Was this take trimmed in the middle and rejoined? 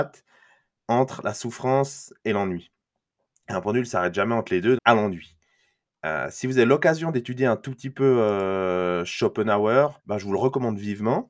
yes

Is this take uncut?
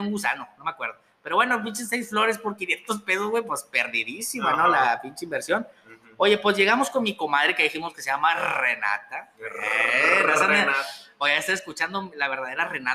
yes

